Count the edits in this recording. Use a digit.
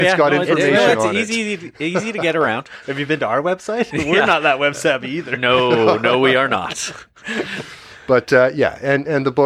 0